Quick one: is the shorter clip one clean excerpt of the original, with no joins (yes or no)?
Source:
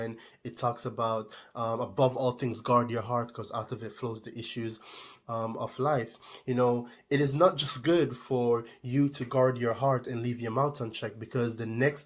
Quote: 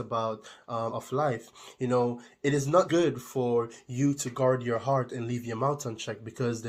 no